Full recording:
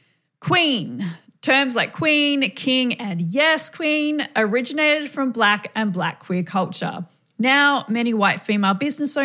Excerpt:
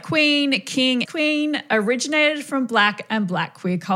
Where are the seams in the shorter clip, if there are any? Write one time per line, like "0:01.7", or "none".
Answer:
0:01.1